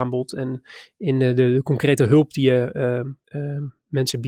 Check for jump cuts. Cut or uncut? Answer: cut